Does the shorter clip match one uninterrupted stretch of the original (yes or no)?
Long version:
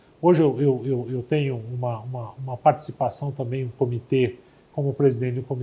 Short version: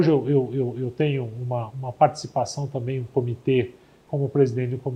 no